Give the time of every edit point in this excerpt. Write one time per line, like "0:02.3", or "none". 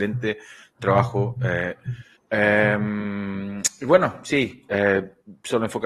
0:02.2